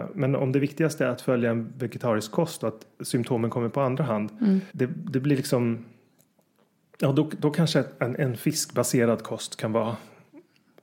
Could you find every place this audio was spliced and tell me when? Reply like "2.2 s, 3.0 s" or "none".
4.7 s